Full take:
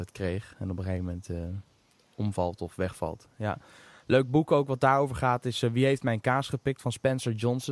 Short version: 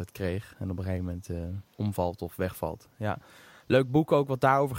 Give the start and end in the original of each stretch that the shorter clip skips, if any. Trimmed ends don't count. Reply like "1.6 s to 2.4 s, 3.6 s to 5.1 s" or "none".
1.7 s to 2.1 s